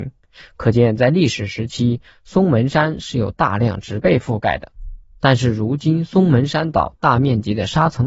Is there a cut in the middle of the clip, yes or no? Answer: no